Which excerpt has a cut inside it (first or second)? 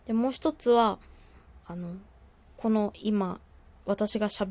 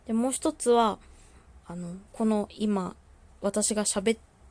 second